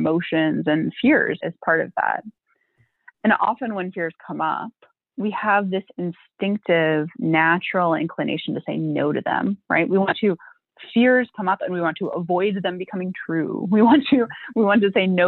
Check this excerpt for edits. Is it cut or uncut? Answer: cut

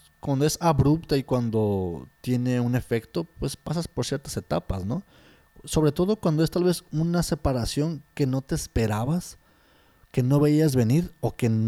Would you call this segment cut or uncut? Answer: uncut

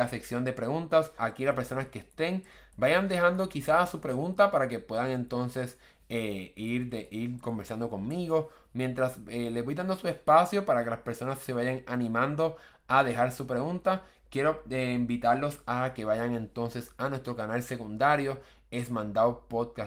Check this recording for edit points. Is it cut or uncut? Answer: cut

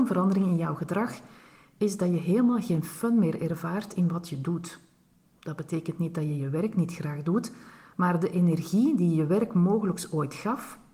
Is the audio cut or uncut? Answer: uncut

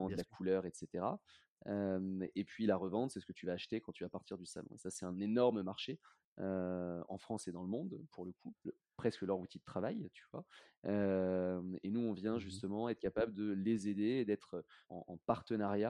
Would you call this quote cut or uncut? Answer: cut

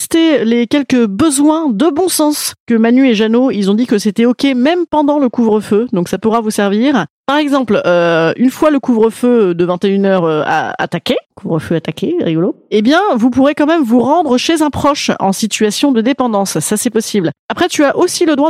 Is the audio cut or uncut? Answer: cut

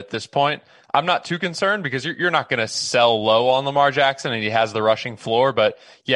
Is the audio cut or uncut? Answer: uncut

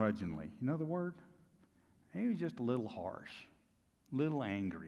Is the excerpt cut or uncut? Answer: uncut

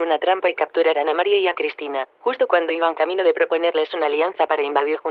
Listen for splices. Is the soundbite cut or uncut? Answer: uncut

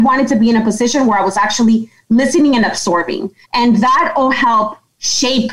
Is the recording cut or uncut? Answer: cut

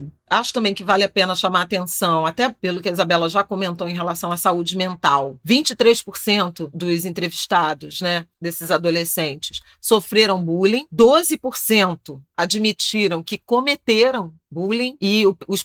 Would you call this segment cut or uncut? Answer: uncut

